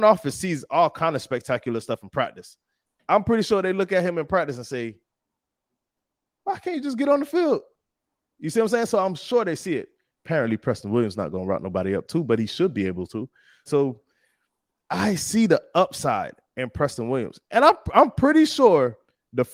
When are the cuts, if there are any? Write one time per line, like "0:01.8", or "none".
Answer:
0:10.2
0:13.7